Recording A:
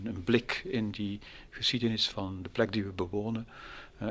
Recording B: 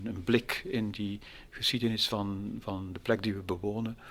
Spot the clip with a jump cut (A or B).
A